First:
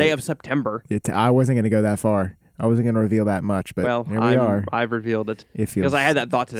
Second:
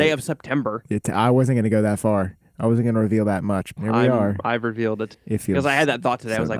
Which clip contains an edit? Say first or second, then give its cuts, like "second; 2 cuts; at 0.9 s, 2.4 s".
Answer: second; 1 cut; at 3.8 s